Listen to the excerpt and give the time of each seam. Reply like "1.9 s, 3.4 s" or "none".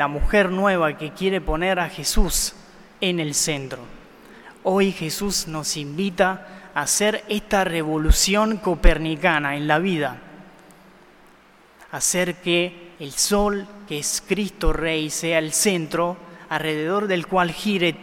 12.9 s